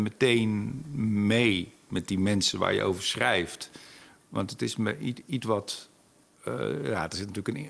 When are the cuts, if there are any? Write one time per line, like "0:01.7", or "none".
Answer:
none